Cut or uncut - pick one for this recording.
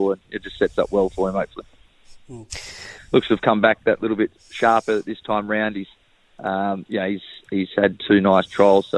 cut